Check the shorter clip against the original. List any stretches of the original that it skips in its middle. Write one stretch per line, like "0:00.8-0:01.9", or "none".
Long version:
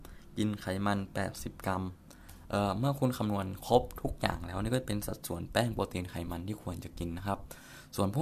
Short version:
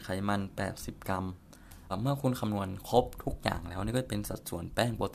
0:02.5-0:02.7